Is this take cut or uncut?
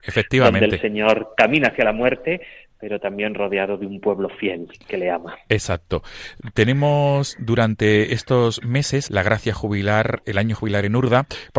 cut